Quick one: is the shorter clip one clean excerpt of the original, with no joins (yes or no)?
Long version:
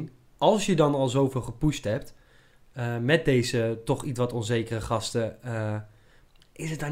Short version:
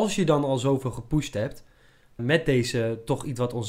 no